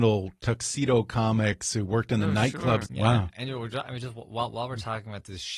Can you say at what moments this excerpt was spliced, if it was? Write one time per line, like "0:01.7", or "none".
0:02.9